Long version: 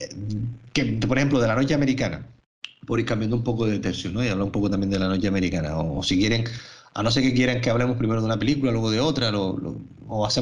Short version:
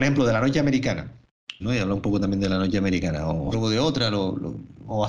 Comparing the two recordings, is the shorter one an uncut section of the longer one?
no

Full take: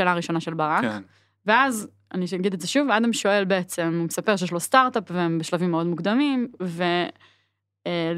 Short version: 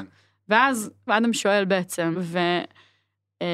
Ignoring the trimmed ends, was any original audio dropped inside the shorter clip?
yes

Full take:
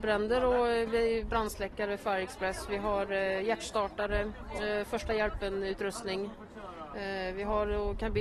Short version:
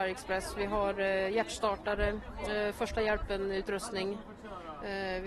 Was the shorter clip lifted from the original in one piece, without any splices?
yes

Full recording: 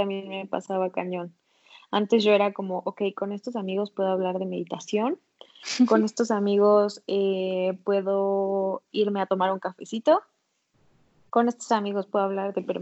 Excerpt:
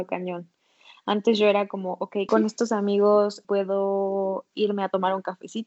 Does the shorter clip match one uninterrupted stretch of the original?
no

